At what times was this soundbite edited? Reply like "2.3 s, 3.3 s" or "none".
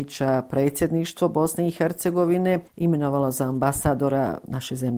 none